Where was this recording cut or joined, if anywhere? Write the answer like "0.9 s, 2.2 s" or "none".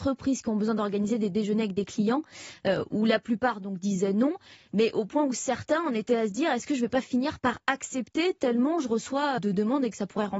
9.4 s